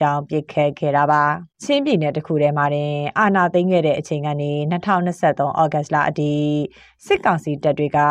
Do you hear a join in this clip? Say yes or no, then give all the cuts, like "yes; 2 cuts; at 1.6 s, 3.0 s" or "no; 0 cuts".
yes; 1 cut; at 1.5 s